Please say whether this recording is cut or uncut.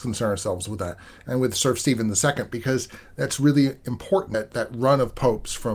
uncut